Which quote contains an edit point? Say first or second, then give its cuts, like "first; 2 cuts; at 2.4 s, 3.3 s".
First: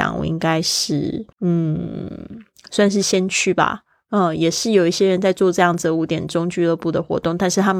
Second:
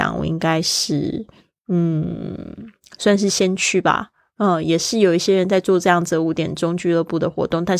first; 1 cut; at 1.3 s